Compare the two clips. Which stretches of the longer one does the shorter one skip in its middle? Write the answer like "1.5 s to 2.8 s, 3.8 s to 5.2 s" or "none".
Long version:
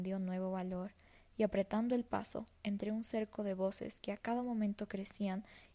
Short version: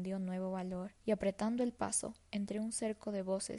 1.0 s to 1.3 s